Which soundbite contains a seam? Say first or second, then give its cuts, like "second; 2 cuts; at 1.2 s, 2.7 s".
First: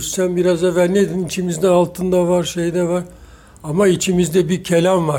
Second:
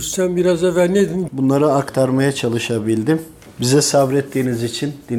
second; 1 cut; at 1.3 s